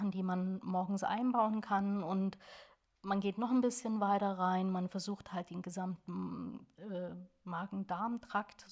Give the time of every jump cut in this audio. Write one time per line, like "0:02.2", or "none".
none